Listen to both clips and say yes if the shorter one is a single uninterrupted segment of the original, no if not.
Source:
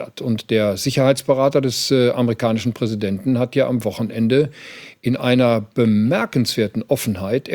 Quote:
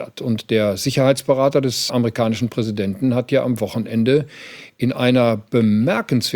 no